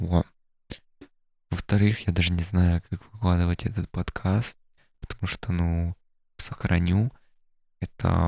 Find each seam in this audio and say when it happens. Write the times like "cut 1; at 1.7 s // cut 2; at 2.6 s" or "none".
cut 1; at 6.4 s